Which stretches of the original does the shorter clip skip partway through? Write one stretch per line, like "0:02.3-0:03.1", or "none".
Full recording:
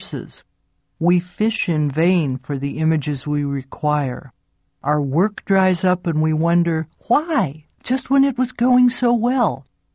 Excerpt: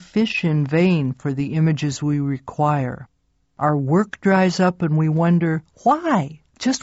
none